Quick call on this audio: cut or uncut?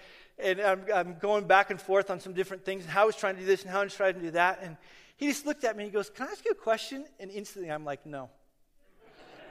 uncut